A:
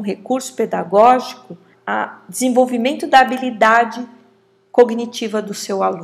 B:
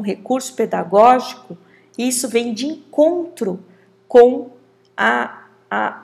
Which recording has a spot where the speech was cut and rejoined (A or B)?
A